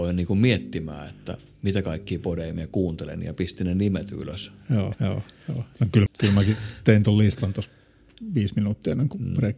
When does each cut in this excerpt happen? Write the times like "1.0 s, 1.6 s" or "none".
4.9 s, 6.1 s